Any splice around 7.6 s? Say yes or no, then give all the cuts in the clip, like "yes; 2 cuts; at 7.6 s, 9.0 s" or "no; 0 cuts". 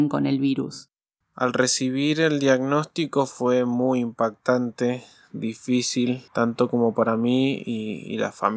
no; 1 cut; at 1.1 s